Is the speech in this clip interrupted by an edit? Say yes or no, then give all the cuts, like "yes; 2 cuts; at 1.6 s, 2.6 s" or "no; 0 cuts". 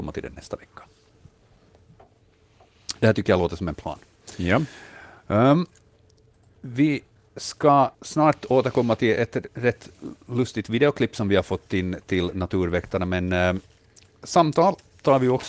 yes; 1 cut; at 7.9 s